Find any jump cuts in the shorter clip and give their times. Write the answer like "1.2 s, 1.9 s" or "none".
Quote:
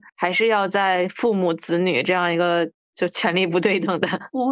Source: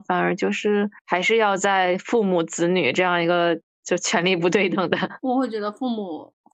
none